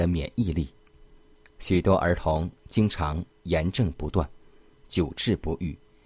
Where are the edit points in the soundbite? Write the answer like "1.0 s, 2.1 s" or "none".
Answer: none